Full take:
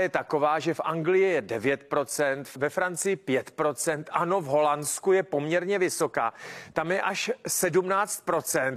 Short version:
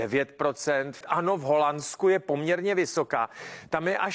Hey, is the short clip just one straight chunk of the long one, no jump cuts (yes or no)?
no